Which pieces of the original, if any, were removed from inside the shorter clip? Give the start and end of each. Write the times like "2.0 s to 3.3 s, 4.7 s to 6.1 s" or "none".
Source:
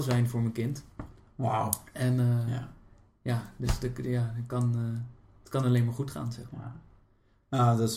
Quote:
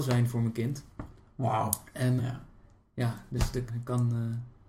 2.2 s to 2.4 s, 3.9 s to 4.3 s

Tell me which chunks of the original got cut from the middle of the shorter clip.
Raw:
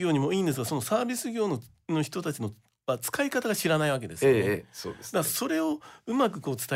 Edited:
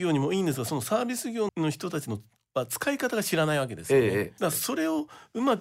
1.5 s to 1.8 s, 4.7 s to 5.1 s

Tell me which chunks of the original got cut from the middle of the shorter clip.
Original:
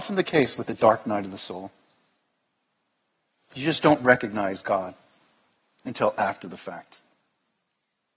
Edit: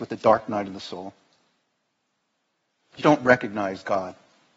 3.6 s to 3.8 s

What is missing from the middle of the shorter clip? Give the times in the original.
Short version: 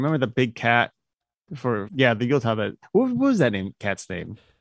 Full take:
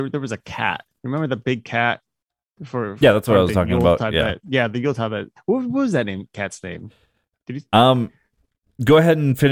3.0 s to 4.4 s

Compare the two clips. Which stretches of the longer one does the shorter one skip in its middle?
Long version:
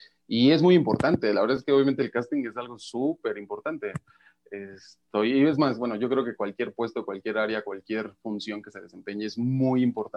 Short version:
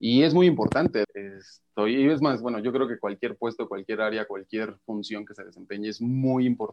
1.3 s to 4.4 s

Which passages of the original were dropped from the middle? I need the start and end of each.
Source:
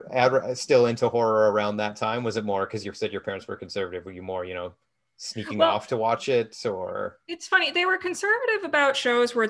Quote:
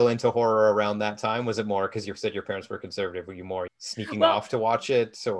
4.5 s to 5.1 s

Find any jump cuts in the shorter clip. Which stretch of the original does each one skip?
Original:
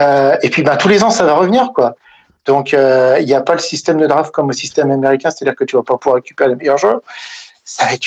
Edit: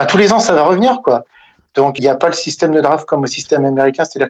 2.7 s to 3.2 s

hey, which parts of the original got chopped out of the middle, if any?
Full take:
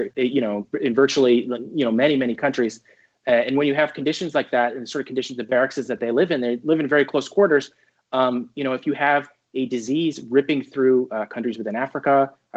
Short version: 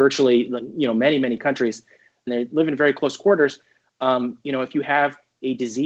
3.2 s to 6.4 s

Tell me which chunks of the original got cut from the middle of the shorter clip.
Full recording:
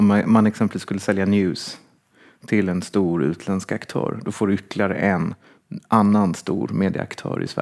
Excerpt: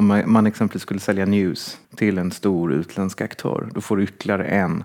1.8 s to 2.4 s

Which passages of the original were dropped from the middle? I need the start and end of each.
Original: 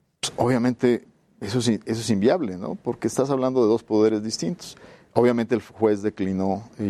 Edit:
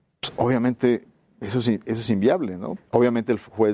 2.8 s to 5.0 s

